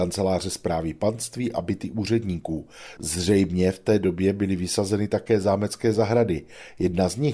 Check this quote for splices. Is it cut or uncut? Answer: cut